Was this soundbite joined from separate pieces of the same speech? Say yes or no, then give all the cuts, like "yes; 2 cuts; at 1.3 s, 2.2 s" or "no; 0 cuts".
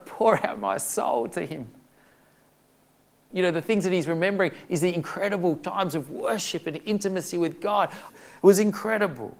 yes; 2 cuts; at 3.3 s, 8.1 s